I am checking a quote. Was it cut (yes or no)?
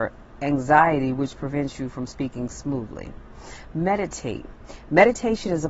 no